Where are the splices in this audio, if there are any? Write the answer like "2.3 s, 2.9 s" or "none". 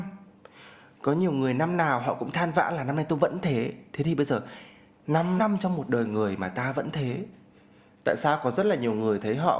5.4 s